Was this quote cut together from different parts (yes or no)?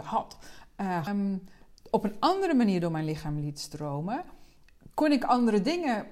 yes